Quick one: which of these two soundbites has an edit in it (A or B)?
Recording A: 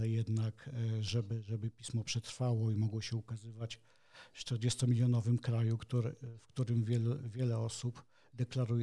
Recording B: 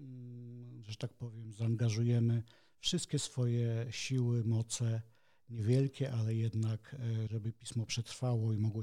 B